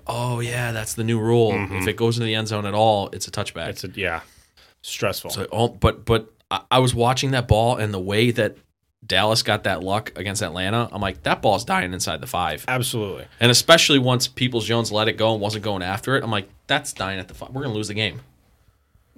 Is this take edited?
no; 0 cuts

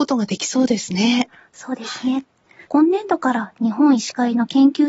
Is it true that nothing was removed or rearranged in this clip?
no; 1 cut; at 2.7 s

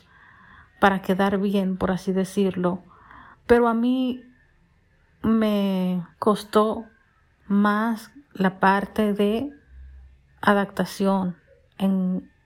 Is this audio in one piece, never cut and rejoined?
no; 2 cuts; at 3.3 s, 6.1 s

